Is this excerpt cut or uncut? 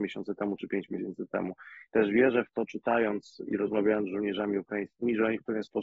cut